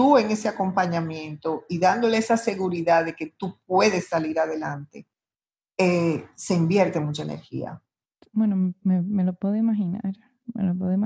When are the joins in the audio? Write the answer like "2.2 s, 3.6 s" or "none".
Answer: 8.2 s